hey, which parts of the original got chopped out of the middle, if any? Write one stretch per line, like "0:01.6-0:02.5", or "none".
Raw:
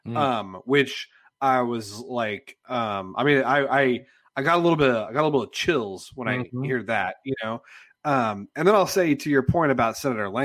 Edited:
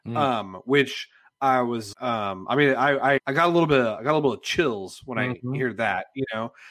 0:01.9-0:02.6
0:03.9-0:04.3